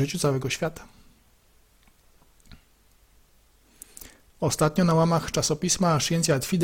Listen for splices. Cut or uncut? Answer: uncut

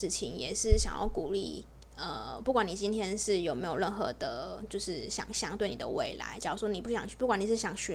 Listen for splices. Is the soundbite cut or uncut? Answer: uncut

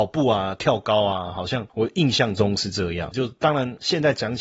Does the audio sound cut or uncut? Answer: cut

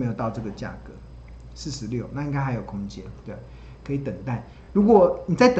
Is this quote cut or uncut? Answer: uncut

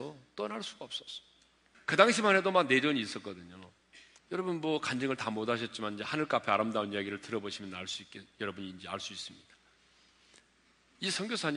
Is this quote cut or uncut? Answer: cut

